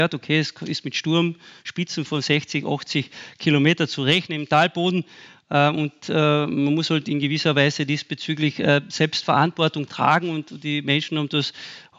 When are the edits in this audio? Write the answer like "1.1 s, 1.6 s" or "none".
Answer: none